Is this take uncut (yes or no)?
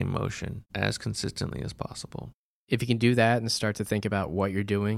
no